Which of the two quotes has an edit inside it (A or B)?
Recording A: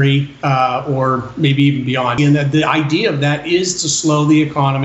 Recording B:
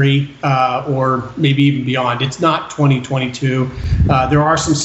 A